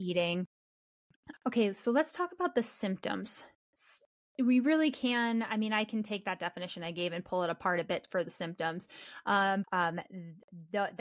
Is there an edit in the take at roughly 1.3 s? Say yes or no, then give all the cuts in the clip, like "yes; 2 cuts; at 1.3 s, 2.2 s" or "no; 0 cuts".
yes; 2 cuts; at 1.3 s, 9.6 s